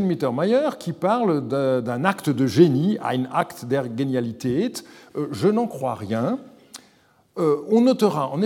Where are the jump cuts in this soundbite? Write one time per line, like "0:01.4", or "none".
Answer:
none